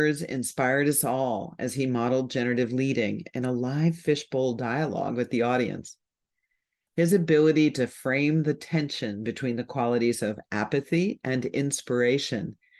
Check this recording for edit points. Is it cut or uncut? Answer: uncut